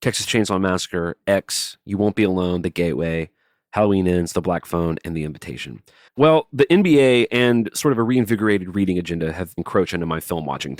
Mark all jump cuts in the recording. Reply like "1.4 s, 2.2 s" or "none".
6.1 s, 9.6 s